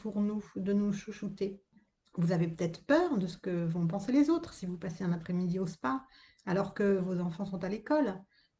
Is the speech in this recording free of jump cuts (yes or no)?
yes